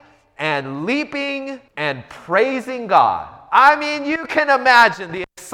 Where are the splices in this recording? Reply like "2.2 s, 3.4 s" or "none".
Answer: 1.7 s